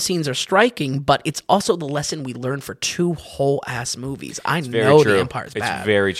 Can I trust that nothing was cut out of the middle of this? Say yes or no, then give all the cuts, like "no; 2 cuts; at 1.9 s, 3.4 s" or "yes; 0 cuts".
yes; 0 cuts